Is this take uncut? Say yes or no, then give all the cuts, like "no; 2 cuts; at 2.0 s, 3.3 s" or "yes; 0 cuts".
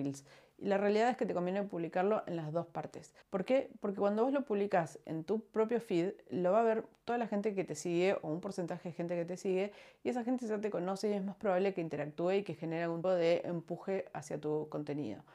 no; 2 cuts; at 3.2 s, 13.0 s